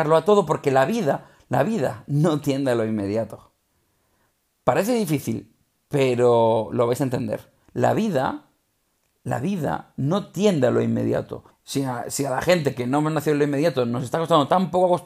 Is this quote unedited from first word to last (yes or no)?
no